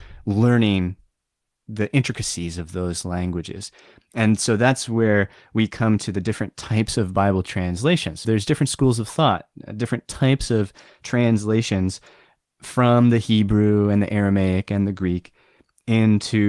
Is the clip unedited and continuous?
no; 1 cut; at 8.2 s

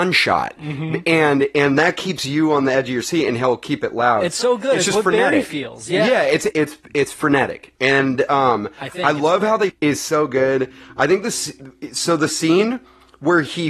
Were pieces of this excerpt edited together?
yes; 2 cuts; at 6.5 s, 9.7 s

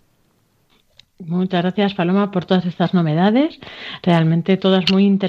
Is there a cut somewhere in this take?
no; 0 cuts

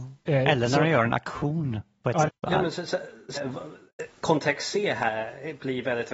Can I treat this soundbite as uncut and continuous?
no; 2 cuts; at 2.3 s, 3.4 s

